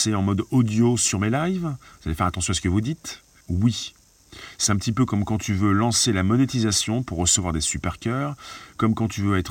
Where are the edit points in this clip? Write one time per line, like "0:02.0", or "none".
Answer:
0:03.4